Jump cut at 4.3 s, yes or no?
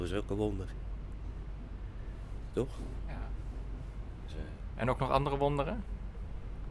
yes